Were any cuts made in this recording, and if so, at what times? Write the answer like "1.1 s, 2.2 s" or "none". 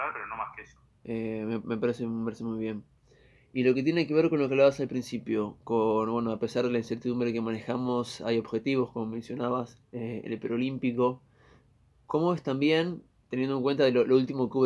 none